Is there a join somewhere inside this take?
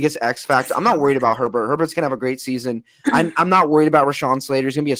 no; 0 cuts

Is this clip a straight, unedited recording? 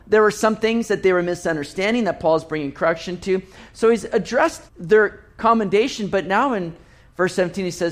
no; 1 cut; at 4.7 s

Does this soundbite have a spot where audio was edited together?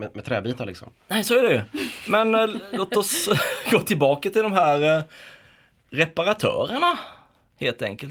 no; 0 cuts

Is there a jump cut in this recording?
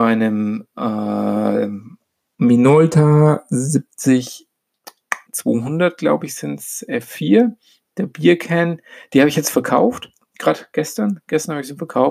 yes; 1 cut; at 5.3 s

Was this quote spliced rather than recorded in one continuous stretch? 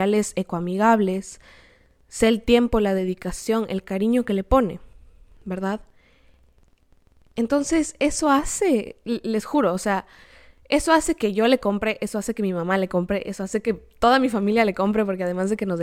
no; 0 cuts

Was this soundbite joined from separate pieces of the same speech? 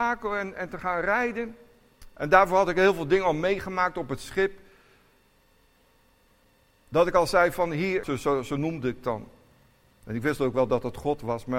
yes; 1 cut; at 8.0 s

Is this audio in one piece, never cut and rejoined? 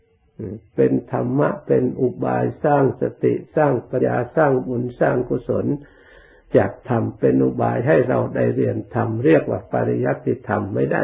no; 1 cut; at 4.0 s

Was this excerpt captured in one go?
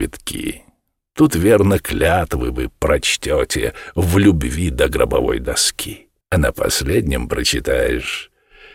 no; 1 cut; at 6.2 s

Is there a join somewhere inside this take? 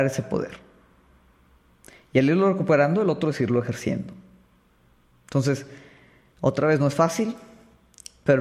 no; 0 cuts

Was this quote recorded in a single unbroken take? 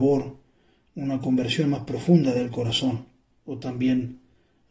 no; 1 cut; at 3.3 s

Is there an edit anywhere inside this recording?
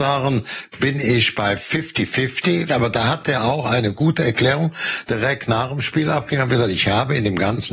yes; 1 cut; at 2.7 s

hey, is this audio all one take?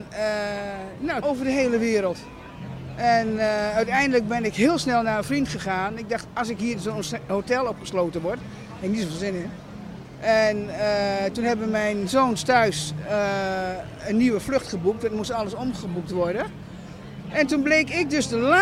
no; 1 cut; at 1.2 s

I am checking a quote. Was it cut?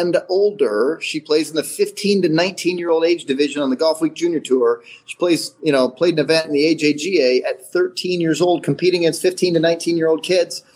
no; 0 cuts

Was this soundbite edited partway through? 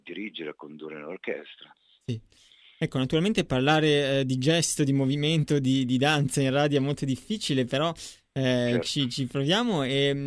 no; 0 cuts

